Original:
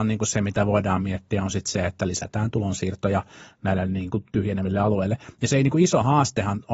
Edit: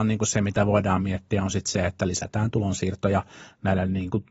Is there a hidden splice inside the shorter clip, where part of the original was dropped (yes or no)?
no